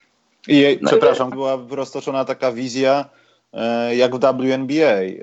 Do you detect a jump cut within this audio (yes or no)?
yes